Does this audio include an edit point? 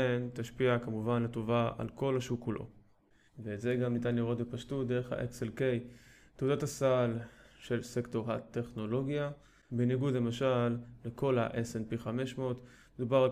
yes; 2 cuts; at 3.3 s, 9.7 s

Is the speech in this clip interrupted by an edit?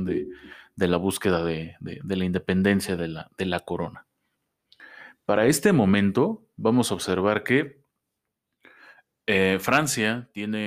no; 0 cuts

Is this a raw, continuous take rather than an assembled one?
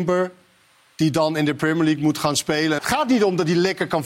no; 1 cut; at 2.8 s

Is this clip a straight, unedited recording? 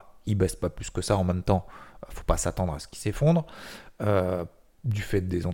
yes; 0 cuts

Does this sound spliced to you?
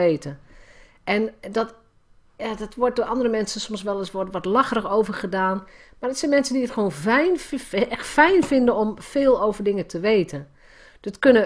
no; 0 cuts

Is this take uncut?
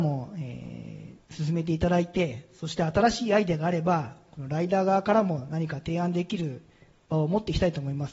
yes; 0 cuts

